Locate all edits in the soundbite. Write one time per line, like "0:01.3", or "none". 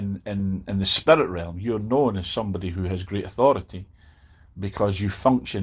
none